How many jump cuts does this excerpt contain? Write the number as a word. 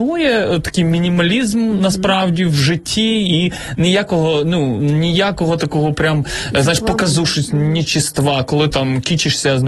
one